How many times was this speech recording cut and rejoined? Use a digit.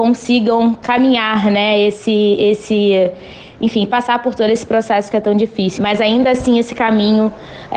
1